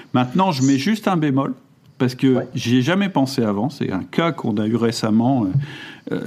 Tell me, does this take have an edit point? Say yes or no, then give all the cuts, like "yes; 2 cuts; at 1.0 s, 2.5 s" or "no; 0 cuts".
no; 0 cuts